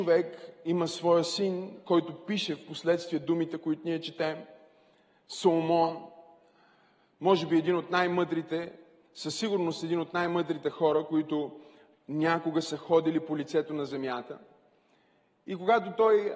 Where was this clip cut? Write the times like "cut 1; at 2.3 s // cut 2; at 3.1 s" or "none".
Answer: none